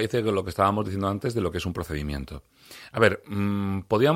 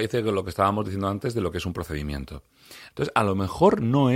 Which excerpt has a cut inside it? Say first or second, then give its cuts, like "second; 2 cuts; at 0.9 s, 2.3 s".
second; 1 cut; at 2.9 s